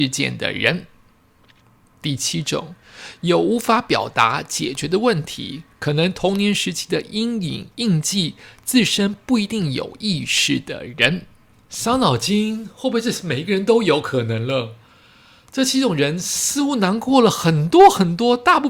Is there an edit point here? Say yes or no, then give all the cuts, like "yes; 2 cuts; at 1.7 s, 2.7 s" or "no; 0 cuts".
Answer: no; 0 cuts